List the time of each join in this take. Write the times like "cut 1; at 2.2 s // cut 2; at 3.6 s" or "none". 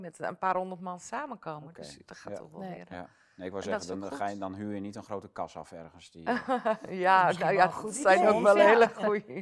none

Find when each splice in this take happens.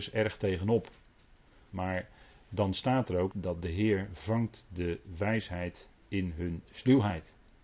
cut 1; at 1.7 s // cut 2; at 3.3 s

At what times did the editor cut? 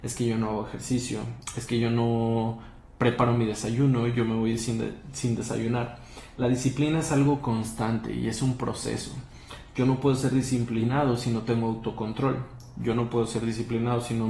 none

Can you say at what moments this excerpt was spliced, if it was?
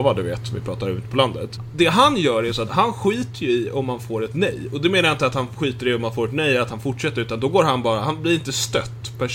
cut 1; at 2.7 s

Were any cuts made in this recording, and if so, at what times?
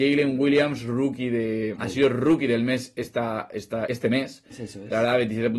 cut 1; at 1.8 s // cut 2; at 3.9 s

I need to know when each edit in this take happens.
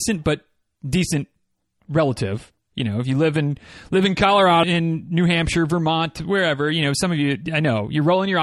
cut 1; at 4.6 s

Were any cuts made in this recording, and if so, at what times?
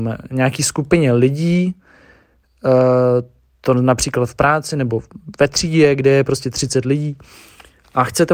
none

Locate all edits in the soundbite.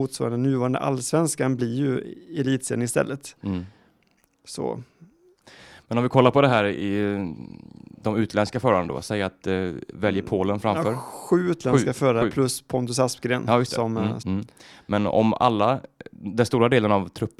cut 1; at 9.9 s // cut 2; at 14.2 s

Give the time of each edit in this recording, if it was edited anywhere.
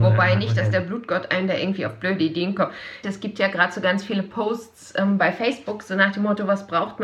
cut 1; at 3.0 s

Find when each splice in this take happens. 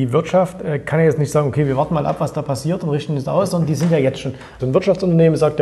cut 1; at 4.6 s

